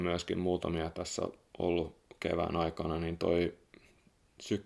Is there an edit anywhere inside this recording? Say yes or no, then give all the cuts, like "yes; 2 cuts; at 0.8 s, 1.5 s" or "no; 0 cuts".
no; 0 cuts